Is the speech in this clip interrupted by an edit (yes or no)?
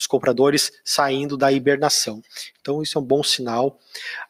yes